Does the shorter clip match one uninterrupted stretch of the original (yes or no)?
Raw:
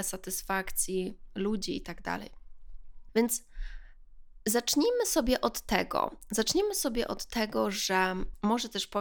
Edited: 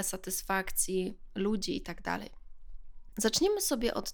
no